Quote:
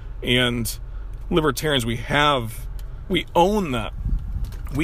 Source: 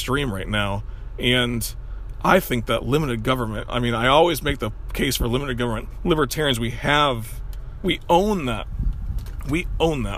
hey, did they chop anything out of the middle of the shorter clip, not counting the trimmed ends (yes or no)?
yes